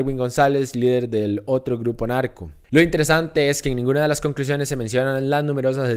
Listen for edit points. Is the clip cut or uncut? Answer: cut